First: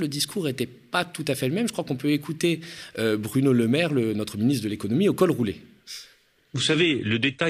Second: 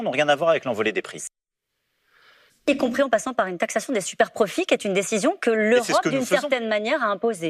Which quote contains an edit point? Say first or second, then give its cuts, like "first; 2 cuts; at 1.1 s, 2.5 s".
second; 1 cut; at 2.5 s